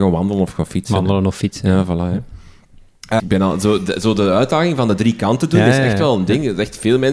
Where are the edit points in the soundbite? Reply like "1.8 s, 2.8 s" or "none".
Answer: 3.2 s